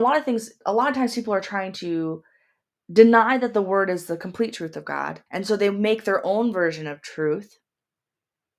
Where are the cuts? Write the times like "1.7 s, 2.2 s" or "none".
5.3 s

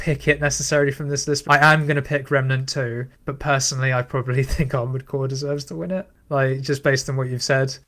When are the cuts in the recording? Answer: 1.4 s

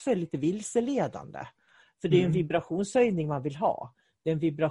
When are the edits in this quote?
1.8 s

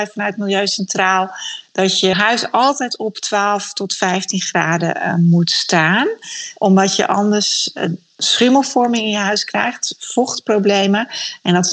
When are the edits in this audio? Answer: 2.1 s

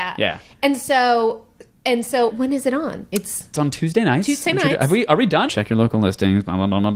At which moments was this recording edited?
2.3 s, 5.5 s

